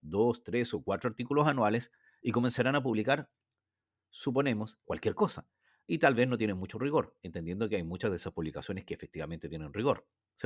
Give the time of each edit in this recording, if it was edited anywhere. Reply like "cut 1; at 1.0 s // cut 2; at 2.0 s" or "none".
cut 1; at 4.8 s